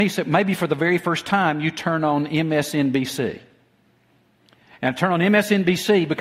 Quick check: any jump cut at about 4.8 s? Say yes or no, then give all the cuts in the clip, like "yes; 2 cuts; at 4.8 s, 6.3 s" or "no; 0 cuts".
no; 0 cuts